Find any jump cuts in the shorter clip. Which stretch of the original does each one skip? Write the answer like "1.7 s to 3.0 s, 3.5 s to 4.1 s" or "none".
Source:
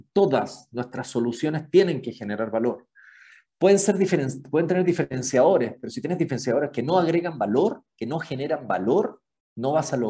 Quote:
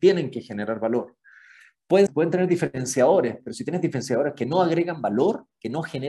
3.8 s to 4.4 s